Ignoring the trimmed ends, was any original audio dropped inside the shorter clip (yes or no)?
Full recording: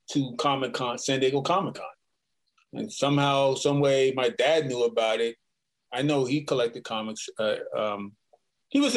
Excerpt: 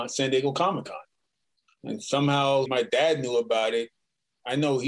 yes